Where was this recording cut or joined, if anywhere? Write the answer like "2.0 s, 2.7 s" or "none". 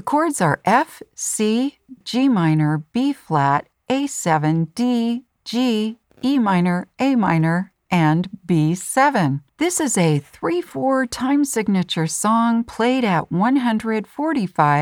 2.0 s, 9.5 s